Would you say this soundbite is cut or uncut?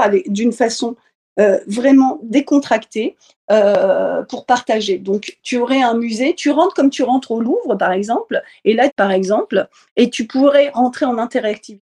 cut